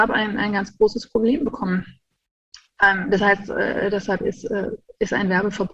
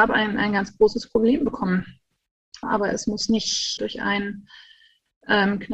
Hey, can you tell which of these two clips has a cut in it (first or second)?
second